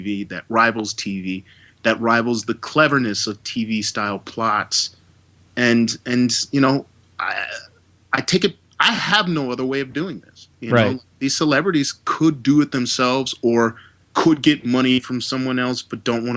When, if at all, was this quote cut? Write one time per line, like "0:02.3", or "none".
0:10.5